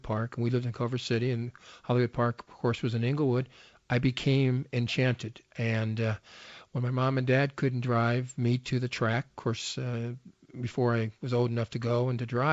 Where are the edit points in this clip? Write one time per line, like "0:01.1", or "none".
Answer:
none